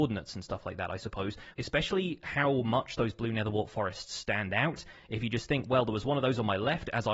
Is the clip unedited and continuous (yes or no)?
no